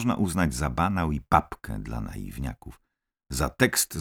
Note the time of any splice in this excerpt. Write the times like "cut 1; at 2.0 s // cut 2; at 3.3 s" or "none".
none